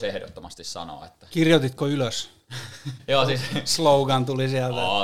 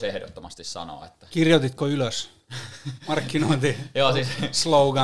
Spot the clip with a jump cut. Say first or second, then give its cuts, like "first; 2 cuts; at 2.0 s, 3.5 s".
first; 1 cut; at 3.0 s